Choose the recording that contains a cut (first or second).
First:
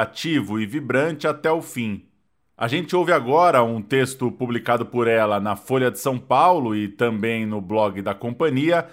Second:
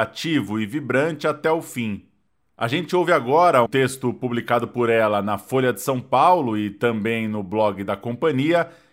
second